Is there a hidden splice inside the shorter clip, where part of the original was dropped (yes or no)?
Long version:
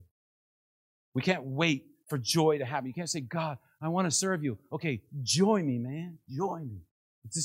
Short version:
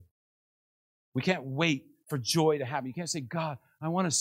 no